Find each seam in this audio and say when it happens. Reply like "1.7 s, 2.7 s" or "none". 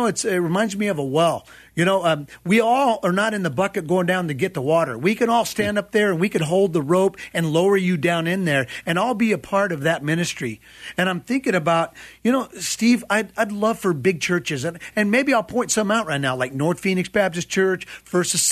none